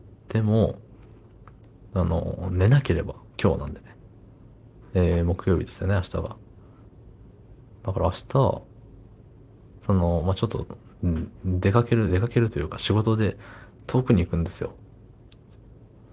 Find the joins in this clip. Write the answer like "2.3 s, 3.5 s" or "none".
4.8 s